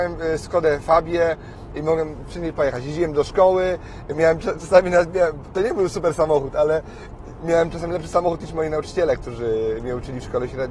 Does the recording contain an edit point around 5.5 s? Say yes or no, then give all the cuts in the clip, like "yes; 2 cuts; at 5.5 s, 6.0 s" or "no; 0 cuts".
no; 1 cut; at 1.8 s